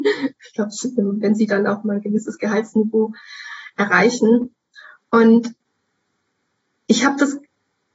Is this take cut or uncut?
cut